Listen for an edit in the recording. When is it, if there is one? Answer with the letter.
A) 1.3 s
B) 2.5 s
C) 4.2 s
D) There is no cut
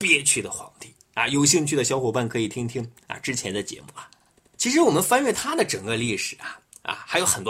D